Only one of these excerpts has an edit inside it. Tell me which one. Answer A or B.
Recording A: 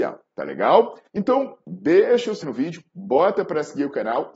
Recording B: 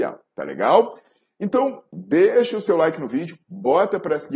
A